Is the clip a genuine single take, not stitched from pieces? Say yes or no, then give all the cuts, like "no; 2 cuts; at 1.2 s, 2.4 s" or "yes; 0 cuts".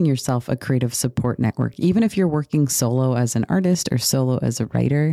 yes; 0 cuts